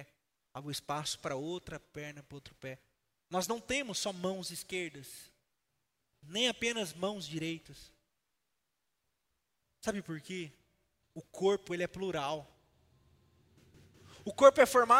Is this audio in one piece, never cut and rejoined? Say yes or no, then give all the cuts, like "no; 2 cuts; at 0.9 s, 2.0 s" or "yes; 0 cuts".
yes; 0 cuts